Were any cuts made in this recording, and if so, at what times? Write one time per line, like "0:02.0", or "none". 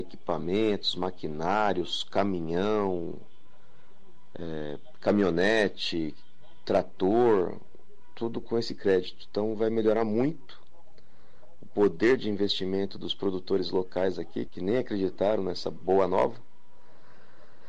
0:08.4
0:14.5